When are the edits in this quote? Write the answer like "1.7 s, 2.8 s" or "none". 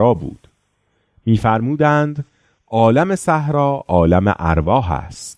none